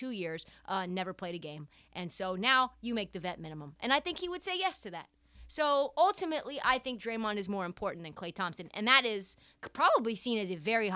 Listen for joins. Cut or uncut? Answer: uncut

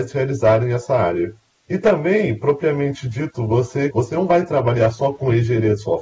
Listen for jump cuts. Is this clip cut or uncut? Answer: cut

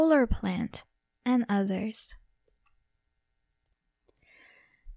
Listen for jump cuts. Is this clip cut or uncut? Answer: uncut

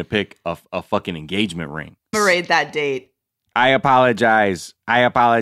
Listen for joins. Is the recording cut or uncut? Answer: cut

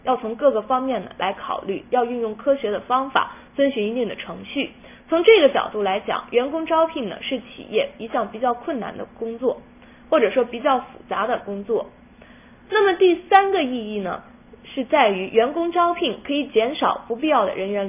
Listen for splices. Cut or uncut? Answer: uncut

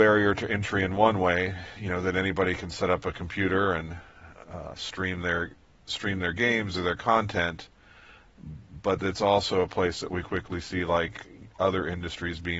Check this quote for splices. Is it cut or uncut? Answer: uncut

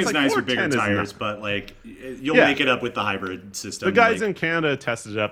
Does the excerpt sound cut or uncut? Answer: uncut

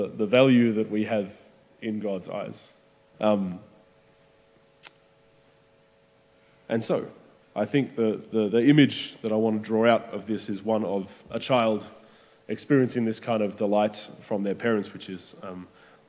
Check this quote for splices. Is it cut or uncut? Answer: cut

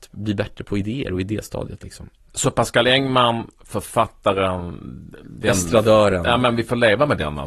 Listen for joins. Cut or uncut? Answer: uncut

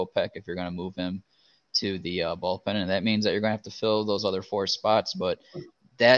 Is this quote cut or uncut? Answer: uncut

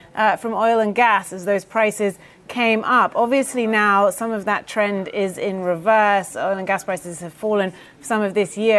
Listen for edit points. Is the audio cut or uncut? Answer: uncut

